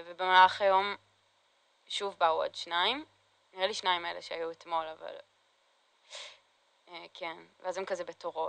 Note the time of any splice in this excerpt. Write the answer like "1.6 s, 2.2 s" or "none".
none